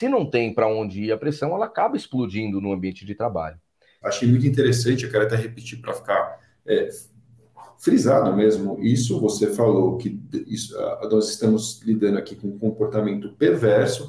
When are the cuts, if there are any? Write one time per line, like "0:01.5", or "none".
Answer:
0:04.0